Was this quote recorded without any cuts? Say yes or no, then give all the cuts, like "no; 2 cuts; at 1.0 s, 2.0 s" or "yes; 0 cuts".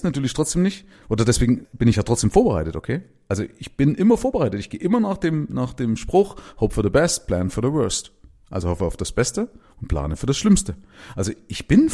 yes; 0 cuts